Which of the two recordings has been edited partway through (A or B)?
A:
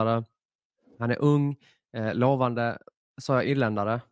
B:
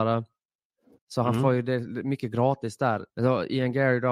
B